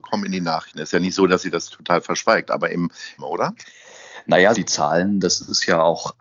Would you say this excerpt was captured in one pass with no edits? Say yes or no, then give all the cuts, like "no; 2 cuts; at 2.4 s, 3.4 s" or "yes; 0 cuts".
no; 2 cuts; at 3.2 s, 4.5 s